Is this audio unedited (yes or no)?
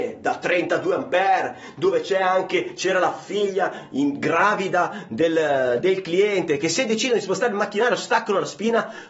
yes